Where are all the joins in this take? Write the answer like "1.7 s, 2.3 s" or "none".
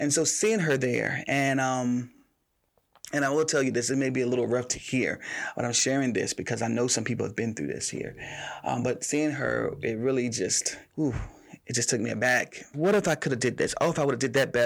10.9 s, 12.7 s